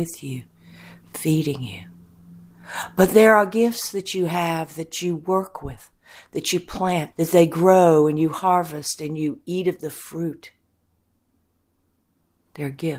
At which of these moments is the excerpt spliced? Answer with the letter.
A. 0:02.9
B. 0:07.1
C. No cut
B